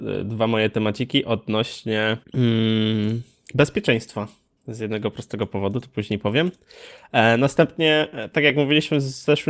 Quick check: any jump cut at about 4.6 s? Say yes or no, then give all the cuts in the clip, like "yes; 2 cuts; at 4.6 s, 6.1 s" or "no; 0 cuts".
yes; 2 cuts; at 2.2 s, 4.6 s